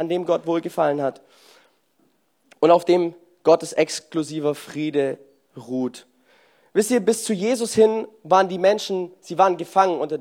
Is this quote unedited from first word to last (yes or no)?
yes